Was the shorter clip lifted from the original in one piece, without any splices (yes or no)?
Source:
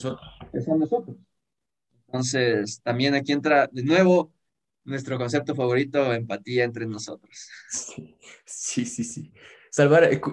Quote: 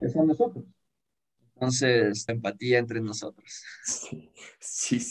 no